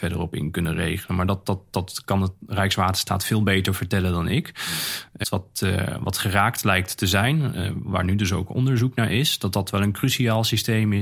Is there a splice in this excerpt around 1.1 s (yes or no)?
no